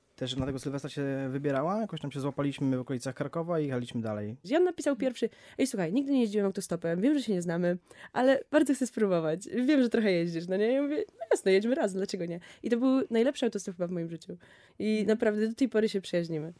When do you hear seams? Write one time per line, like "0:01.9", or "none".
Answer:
0:04.4